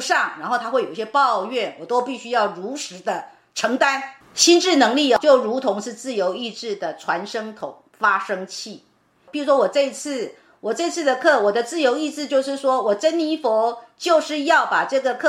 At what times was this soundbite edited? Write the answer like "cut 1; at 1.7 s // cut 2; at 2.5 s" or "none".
cut 1; at 4.2 s